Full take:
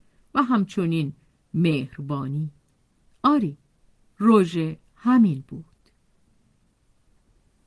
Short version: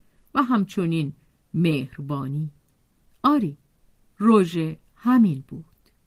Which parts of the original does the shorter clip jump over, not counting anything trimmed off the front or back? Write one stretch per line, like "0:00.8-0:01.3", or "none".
none